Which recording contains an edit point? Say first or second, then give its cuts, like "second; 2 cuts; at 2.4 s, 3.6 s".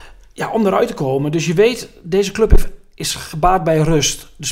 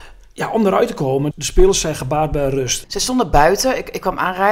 second; 2 cuts; at 1.3 s, 2.8 s